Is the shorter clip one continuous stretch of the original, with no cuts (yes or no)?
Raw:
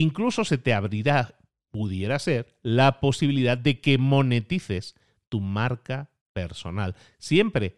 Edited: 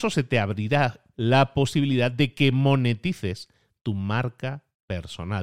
no